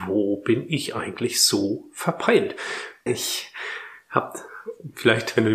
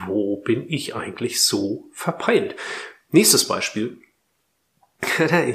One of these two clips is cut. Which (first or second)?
first